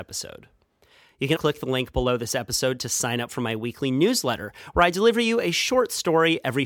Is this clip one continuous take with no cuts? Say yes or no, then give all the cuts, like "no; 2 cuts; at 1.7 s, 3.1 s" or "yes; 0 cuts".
no; 1 cut; at 1.4 s